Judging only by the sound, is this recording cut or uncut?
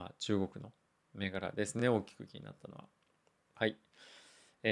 uncut